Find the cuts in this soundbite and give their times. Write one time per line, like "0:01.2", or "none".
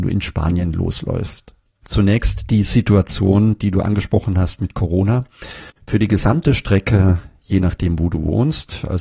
0:01.8
0:05.8